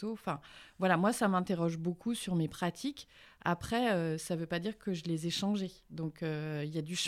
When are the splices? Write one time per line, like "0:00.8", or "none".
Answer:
none